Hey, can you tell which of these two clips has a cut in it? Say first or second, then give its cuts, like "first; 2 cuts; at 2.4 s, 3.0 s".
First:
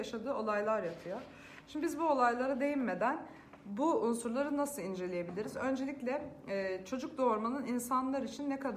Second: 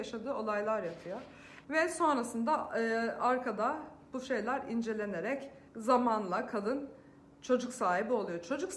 second; 2 cuts; at 1.6 s, 5.7 s